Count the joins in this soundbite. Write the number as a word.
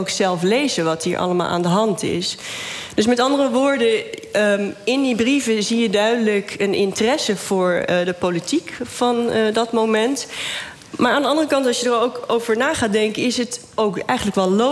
zero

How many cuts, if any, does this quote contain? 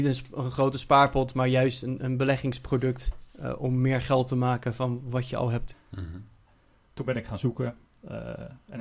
one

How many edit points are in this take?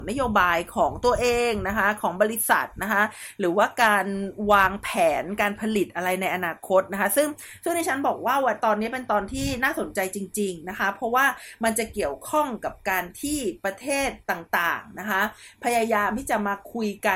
one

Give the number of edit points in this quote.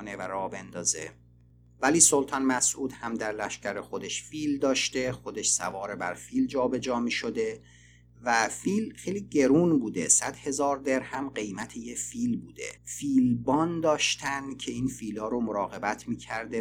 one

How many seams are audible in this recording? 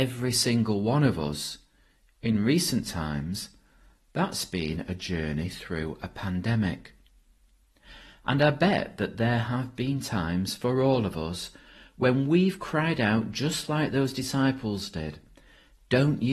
zero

